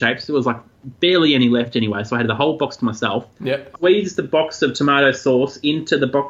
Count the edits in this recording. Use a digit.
1